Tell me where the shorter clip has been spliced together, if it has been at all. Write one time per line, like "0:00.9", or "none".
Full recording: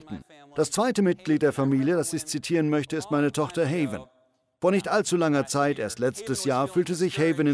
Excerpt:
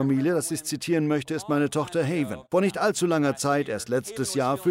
0:02.5

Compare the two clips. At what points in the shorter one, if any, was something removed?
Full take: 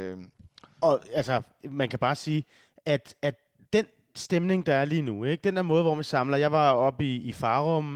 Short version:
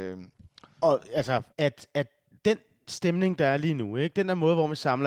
0:01.5

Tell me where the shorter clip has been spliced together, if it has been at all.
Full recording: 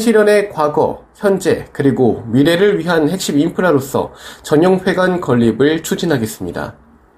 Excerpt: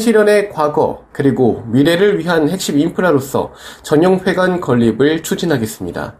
0:01.1

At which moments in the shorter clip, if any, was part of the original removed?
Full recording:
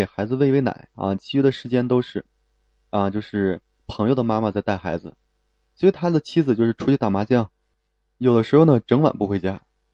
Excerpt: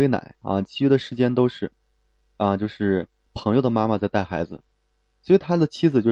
none

